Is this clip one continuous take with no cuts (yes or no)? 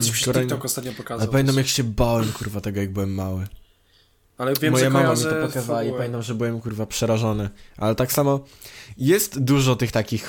no